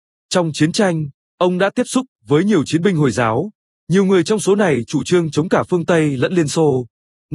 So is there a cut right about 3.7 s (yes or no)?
no